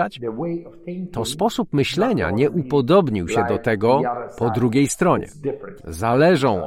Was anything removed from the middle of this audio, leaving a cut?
yes; 1 cut; at 5.8 s

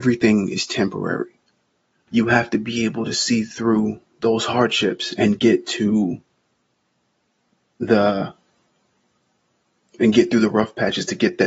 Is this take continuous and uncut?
no; 1 cut; at 2.1 s

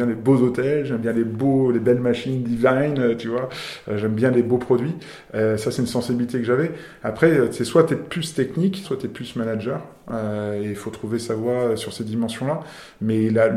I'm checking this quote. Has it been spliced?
yes; 1 cut; at 8.8 s

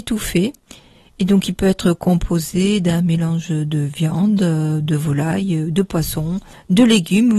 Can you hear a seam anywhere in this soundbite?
no; 0 cuts

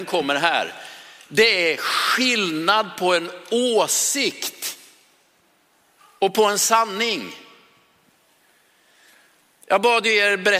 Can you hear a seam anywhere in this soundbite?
no; 0 cuts

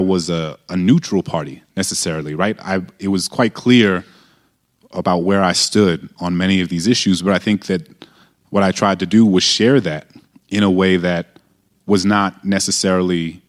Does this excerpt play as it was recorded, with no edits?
no; 1 cut; at 6.2 s

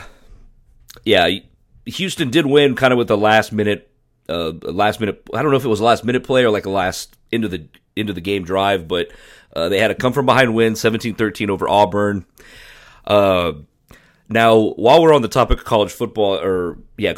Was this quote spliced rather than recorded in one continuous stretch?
no; 0 cuts

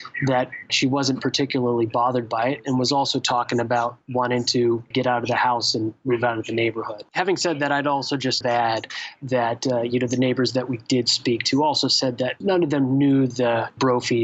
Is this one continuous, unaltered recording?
yes; 0 cuts

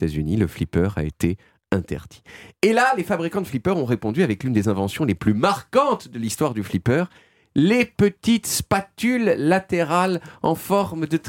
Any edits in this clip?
no; 0 cuts

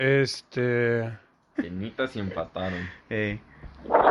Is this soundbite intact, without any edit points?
no; 1 cut; at 1.5 s

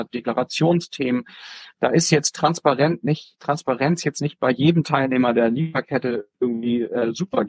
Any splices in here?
no; 0 cuts

